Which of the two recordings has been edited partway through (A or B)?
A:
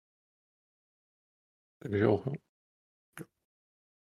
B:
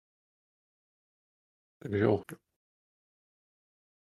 B